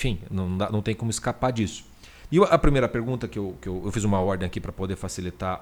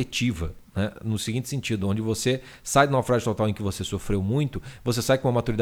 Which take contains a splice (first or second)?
first